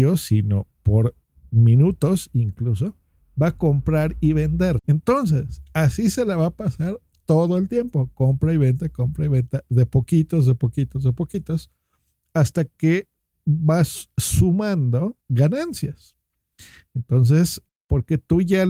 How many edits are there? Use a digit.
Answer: 3